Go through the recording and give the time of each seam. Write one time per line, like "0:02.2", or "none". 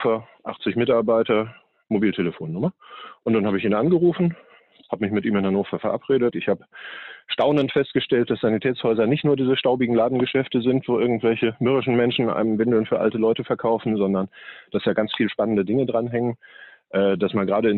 0:06.3